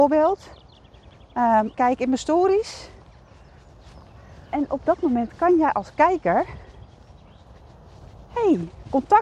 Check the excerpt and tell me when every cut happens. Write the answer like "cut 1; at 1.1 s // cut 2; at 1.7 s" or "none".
cut 1; at 1.7 s